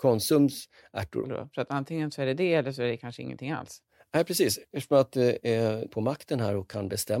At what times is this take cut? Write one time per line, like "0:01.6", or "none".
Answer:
0:01.2
0:05.9